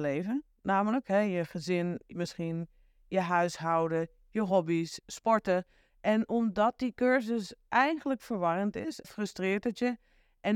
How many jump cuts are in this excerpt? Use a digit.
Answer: 2